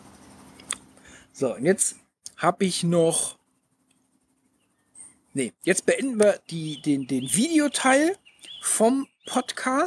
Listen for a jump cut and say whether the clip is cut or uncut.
uncut